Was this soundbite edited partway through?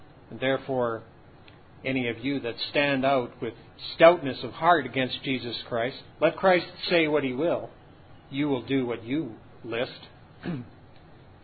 yes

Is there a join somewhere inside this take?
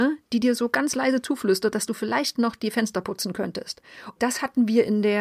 yes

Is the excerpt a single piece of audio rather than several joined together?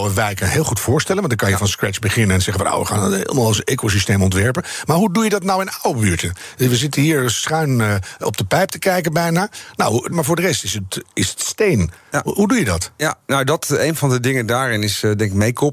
no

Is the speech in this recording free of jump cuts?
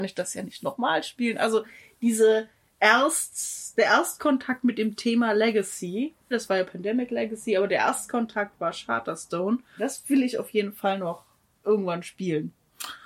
no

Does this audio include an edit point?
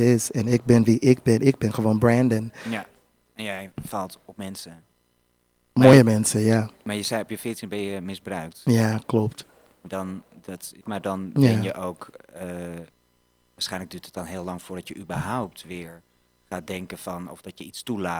yes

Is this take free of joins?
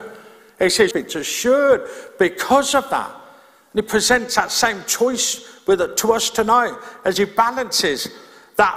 no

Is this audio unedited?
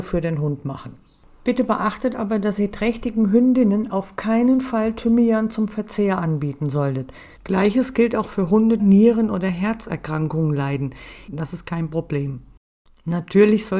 no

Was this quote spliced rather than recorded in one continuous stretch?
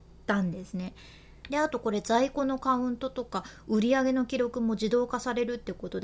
yes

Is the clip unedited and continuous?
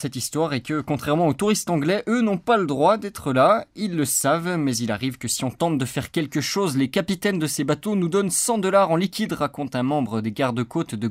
yes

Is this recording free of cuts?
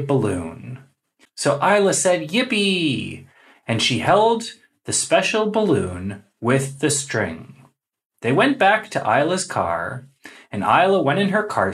no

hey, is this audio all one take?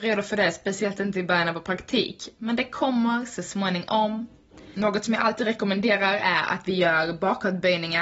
yes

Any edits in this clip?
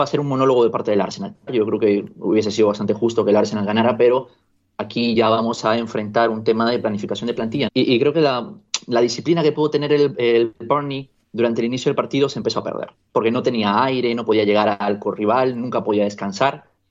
yes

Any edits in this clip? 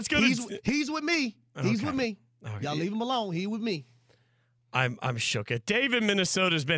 no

